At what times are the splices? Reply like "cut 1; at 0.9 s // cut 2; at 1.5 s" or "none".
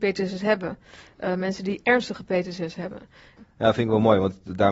cut 1; at 3.4 s